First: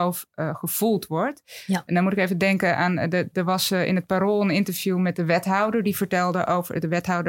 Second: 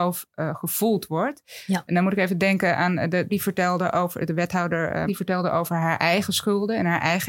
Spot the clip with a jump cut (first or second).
second